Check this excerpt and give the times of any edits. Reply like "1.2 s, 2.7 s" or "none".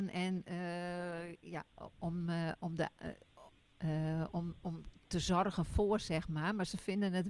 1.9 s